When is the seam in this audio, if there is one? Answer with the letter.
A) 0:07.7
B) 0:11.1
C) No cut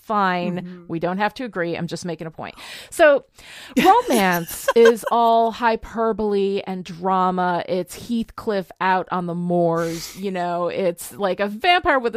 C